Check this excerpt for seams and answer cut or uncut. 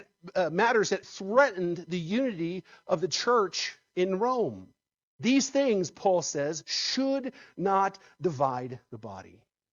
cut